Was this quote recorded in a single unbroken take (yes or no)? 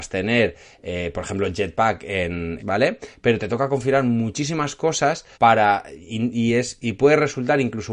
no